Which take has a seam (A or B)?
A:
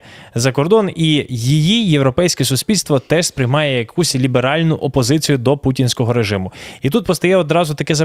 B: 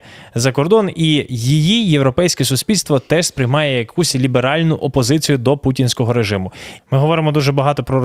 B